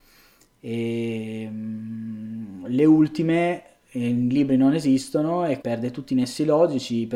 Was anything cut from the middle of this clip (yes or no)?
yes